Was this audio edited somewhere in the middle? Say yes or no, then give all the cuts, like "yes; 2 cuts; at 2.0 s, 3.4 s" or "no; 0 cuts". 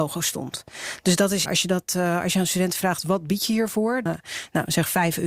yes; 2 cuts; at 1.5 s, 4.1 s